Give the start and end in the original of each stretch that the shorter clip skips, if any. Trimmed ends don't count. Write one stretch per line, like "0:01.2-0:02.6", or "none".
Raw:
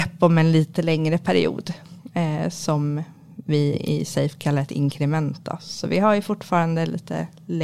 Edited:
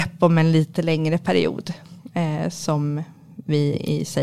none